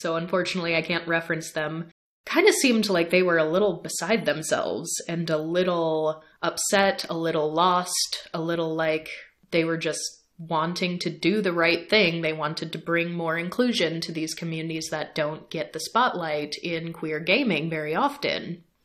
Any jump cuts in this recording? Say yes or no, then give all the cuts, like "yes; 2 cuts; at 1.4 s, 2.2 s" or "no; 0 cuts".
no; 0 cuts